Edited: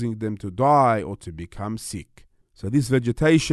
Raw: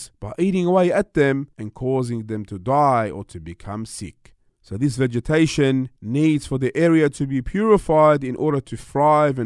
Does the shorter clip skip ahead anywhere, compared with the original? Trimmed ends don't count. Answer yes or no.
no